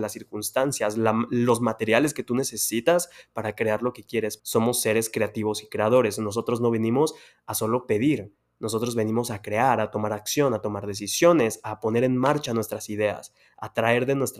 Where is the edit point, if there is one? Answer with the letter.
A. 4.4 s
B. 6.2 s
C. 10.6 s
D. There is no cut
A